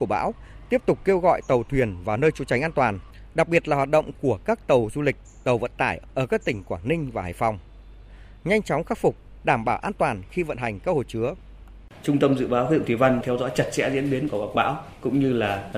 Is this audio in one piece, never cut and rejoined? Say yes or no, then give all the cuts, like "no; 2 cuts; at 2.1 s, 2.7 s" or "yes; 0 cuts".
no; 1 cut; at 9.4 s